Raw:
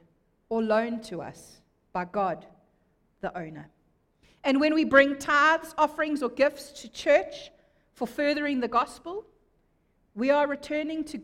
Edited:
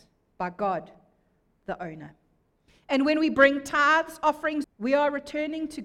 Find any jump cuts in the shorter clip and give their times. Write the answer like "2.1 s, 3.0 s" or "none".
4.6 s